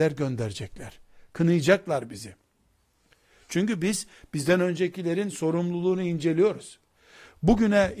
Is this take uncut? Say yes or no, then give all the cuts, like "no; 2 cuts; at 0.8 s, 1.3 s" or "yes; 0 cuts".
yes; 0 cuts